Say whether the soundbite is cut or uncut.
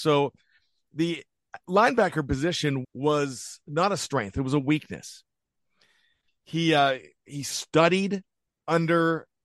cut